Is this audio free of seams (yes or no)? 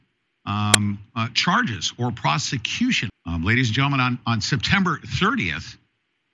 no